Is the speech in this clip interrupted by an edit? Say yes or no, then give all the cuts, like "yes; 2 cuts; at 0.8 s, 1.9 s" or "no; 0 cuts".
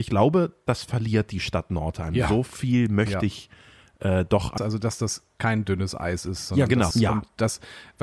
yes; 2 cuts; at 4.6 s, 6.9 s